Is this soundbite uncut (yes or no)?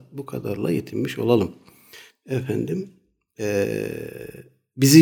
no